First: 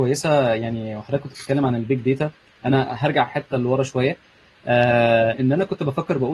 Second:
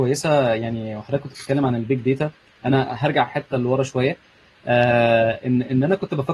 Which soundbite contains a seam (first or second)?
first